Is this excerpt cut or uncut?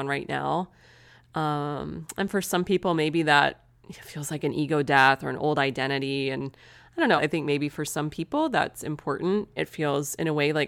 cut